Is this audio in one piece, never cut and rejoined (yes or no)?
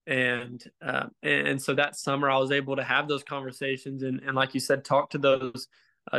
yes